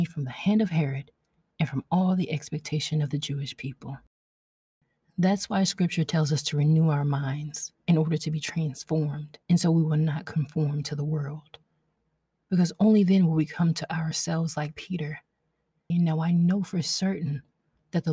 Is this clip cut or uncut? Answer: cut